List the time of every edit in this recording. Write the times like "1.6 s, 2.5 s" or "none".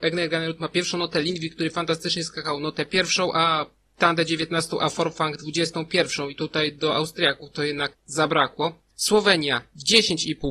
none